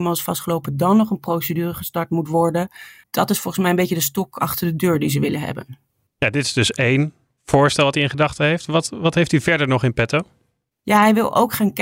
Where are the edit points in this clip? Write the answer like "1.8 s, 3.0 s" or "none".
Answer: 3.0 s